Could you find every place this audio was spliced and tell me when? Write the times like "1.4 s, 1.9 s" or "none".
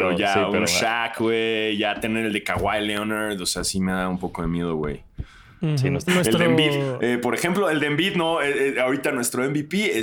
6.1 s